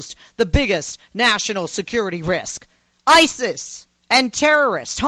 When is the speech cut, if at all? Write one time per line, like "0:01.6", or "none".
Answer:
0:04.0